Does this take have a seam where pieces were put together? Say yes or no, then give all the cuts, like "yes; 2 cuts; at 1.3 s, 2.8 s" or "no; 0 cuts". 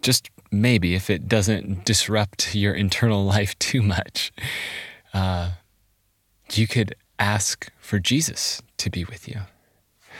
no; 0 cuts